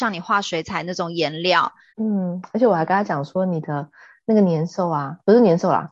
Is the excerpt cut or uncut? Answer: cut